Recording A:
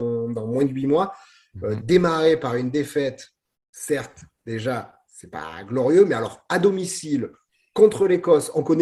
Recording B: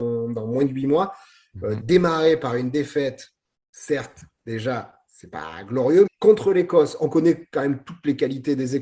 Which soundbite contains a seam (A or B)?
B